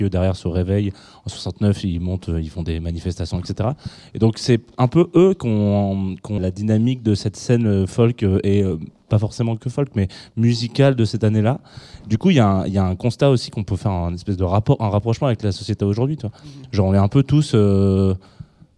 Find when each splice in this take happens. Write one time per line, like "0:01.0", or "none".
0:06.4